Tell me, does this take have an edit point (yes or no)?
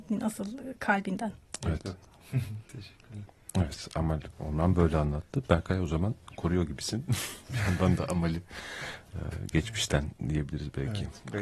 no